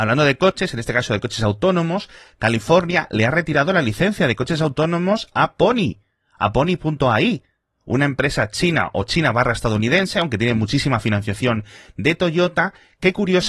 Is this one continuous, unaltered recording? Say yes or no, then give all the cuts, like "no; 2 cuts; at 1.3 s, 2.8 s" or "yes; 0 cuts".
yes; 0 cuts